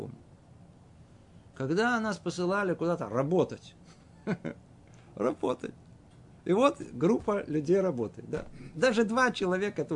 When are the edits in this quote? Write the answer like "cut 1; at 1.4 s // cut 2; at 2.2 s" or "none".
none